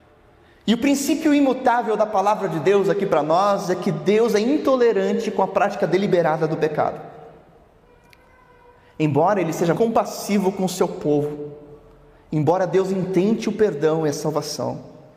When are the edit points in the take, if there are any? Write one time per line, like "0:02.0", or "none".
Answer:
0:09.7

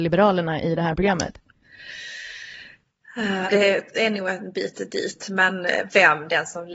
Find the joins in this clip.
0:03.5

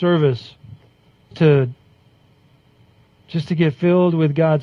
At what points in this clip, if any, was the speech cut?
0:01.3

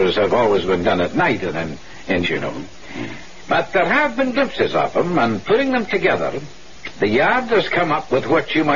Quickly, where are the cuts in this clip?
0:02.2

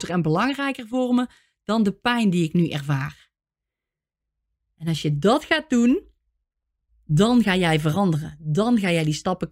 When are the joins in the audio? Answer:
none

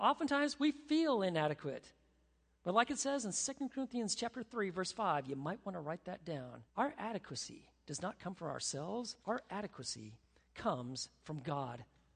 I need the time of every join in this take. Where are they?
0:06.7
0:09.2

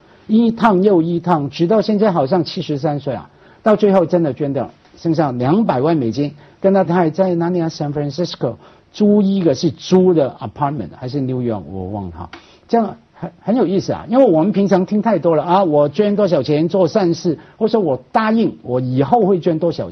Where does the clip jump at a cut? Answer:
0:06.9

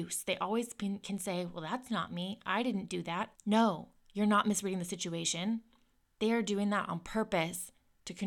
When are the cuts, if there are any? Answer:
0:03.4

